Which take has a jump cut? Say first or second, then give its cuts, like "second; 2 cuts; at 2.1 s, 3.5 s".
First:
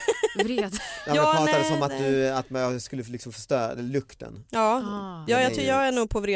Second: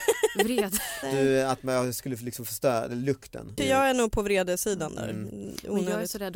second; 2 cuts; at 1.0 s, 3.6 s